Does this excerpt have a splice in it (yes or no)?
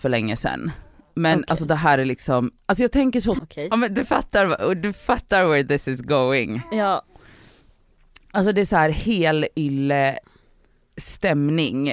yes